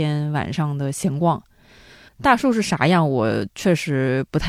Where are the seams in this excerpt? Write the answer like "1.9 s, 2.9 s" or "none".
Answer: 2.1 s